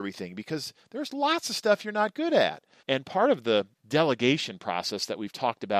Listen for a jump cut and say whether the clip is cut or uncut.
cut